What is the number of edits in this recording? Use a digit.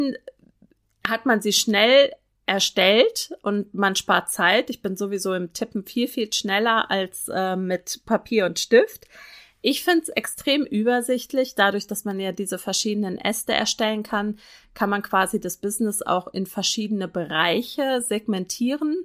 0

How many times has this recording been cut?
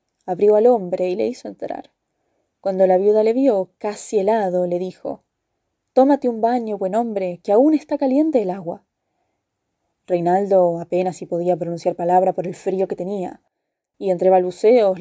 1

